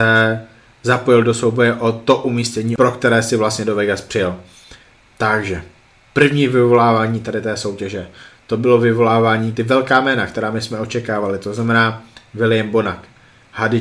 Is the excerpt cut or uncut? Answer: cut